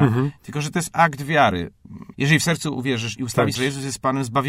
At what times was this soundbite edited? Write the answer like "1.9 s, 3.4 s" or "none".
2.1 s, 3.5 s